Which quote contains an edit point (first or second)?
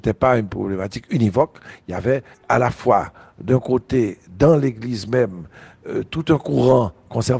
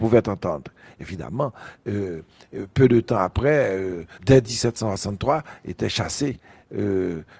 second